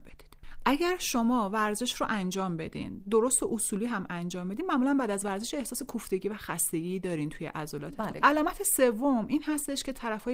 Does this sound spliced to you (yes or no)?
yes